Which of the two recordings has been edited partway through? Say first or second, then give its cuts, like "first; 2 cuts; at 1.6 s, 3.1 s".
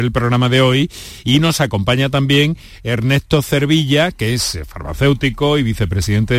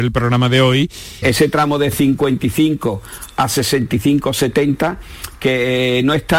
second; 1 cut; at 1.2 s